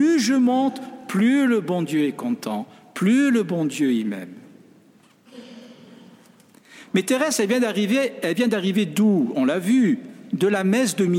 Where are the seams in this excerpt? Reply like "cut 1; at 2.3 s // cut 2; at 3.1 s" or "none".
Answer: none